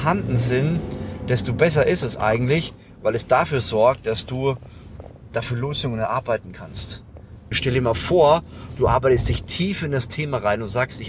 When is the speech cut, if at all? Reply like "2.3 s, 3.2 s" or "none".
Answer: 7.5 s